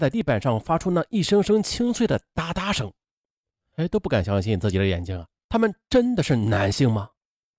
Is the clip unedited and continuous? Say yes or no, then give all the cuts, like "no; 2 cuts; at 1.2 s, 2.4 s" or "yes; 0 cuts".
yes; 0 cuts